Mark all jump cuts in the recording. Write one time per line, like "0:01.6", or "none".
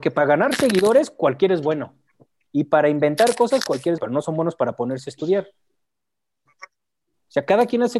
0:04.0
0:06.5